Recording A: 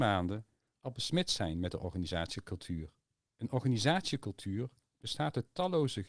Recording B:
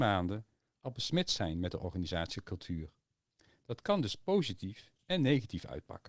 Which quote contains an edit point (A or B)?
A